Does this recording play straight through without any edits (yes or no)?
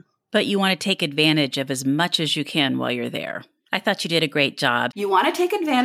no